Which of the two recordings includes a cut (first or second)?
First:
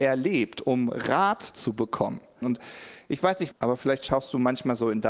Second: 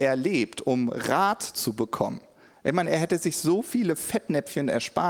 first